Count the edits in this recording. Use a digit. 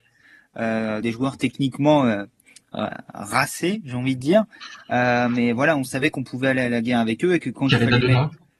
1